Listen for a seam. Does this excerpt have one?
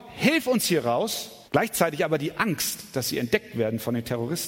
yes; 1 cut; at 1.5 s

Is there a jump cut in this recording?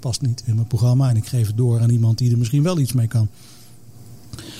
no; 0 cuts

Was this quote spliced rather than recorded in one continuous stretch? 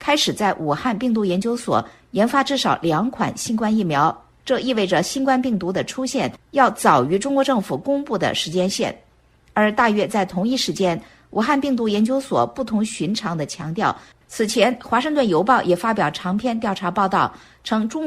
yes; 1 cut; at 14.1 s

